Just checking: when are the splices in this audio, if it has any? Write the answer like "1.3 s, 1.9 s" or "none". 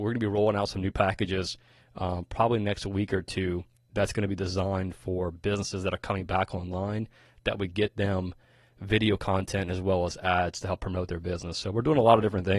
none

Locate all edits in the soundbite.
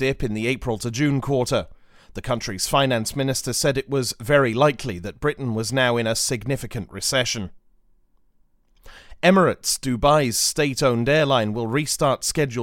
none

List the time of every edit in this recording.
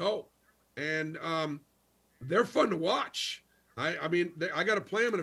none

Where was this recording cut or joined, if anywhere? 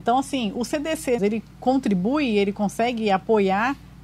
1.2 s

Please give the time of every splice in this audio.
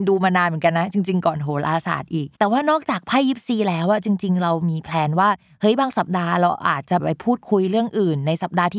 2.3 s

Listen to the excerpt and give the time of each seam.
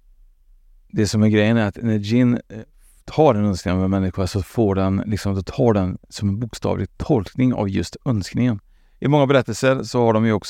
8.8 s

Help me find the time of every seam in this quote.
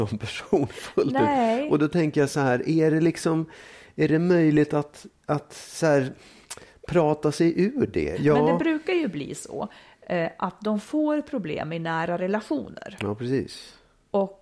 8.1 s

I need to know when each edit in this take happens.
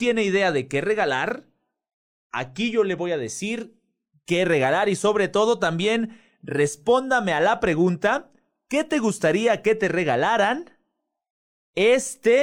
none

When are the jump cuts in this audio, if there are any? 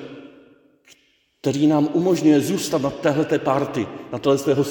none

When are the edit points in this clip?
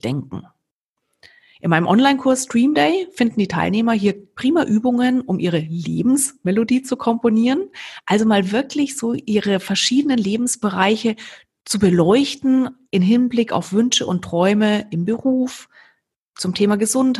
none

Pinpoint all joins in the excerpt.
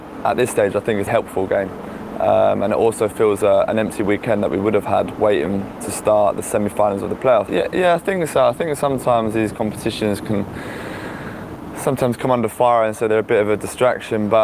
1.1 s, 7.5 s

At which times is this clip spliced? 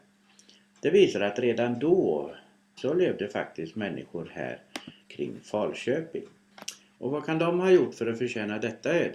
2.8 s, 7.0 s

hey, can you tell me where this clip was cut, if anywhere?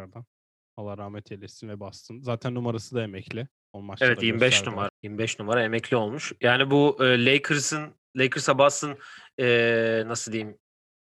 4.9 s

